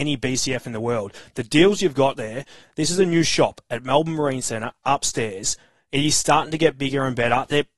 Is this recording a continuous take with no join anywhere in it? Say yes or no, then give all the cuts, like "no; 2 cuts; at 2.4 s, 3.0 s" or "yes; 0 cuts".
yes; 0 cuts